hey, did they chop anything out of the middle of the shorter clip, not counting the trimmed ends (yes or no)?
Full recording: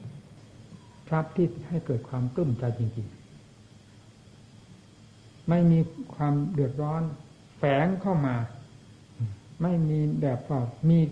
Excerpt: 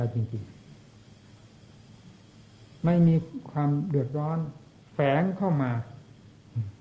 no